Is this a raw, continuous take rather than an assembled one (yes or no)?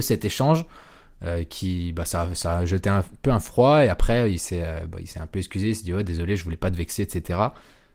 yes